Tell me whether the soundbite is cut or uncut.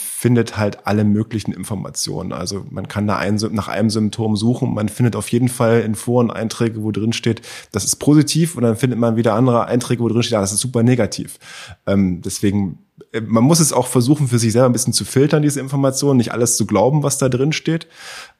uncut